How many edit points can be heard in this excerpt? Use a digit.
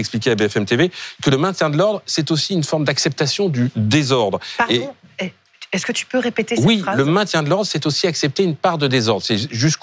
0